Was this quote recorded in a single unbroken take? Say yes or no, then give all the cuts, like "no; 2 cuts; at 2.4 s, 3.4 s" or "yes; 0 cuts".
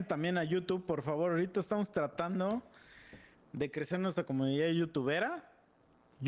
yes; 0 cuts